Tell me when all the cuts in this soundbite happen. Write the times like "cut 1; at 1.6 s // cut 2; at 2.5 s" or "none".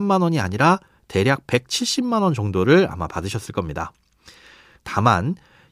cut 1; at 4.7 s